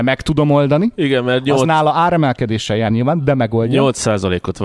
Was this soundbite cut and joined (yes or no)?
no